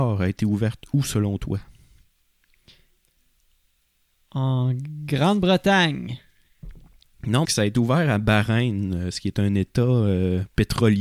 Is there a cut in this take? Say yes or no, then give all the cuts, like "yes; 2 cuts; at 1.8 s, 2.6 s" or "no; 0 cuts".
yes; 1 cut; at 7.4 s